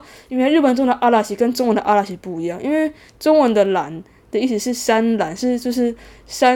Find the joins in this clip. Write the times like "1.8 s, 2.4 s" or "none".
none